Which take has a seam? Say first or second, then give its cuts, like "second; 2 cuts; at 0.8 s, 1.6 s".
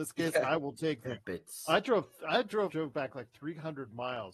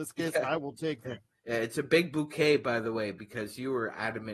first; 2 cuts; at 1.2 s, 2.7 s